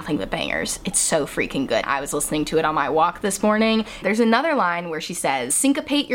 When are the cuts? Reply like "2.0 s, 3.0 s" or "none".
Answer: 1.8 s, 4.0 s